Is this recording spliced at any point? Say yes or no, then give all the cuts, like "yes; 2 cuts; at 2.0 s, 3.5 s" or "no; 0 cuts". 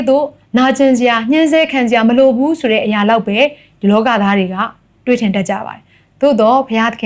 no; 0 cuts